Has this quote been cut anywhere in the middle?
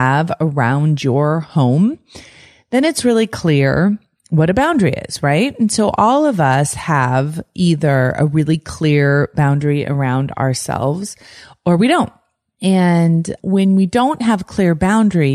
no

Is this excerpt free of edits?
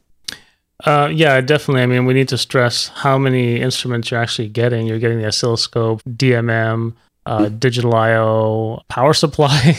no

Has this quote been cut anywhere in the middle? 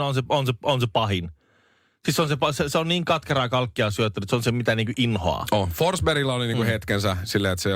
no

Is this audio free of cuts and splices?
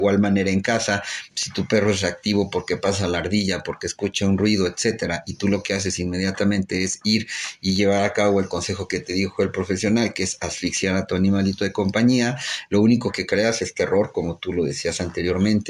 yes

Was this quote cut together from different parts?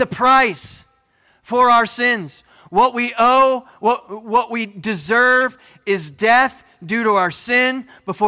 no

